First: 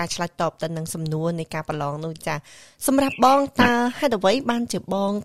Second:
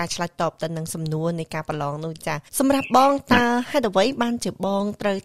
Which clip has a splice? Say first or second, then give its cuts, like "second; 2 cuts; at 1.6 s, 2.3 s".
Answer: second; 1 cut; at 2.5 s